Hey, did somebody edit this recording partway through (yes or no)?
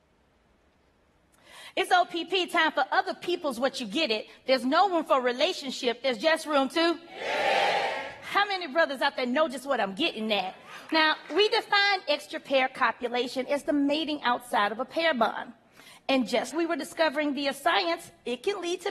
yes